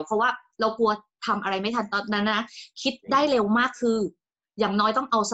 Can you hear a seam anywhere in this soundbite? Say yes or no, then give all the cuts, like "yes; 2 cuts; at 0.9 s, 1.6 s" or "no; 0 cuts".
no; 0 cuts